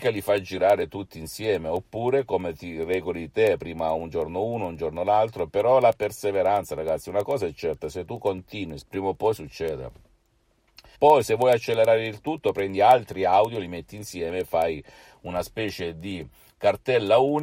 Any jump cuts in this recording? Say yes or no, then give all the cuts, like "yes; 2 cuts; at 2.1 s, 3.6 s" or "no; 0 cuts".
yes; 2 cuts; at 8.8 s, 10.9 s